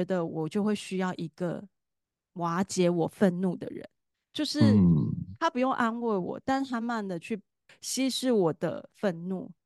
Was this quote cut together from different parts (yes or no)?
yes